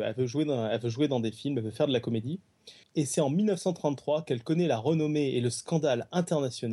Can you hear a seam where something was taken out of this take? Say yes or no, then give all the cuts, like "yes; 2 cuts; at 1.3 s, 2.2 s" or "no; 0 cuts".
yes; 1 cut; at 2.8 s